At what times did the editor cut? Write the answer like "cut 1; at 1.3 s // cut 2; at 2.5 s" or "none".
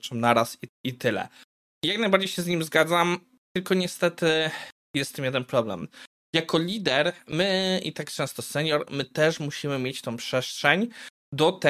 none